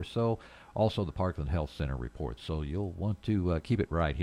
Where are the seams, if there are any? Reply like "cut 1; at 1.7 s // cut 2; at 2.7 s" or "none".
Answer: cut 1; at 2.4 s